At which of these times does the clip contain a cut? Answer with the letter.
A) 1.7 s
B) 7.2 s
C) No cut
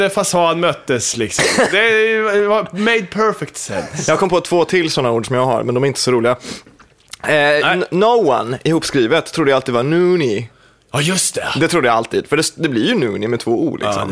C